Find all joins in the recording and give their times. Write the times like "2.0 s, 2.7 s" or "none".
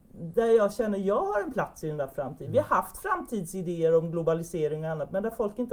none